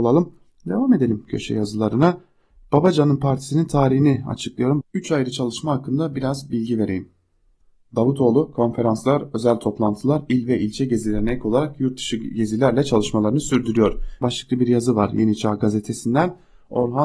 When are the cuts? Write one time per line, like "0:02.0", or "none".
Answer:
0:04.8
0:14.2